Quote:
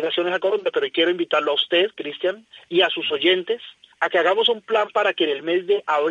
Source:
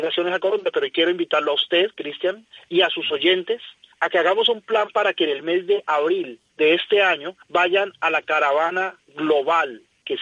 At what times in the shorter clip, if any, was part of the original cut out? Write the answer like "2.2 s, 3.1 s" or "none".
none